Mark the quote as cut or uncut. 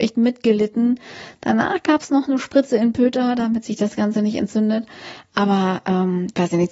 uncut